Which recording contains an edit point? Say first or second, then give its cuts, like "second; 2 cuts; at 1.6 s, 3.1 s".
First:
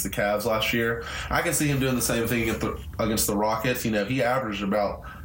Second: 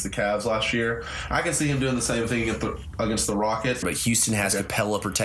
second; 1 cut; at 3.8 s